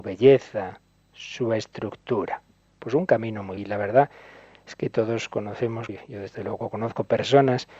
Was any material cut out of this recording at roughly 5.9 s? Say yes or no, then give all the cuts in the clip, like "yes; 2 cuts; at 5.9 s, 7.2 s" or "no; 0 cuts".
yes; 2 cuts; at 3.6 s, 5.9 s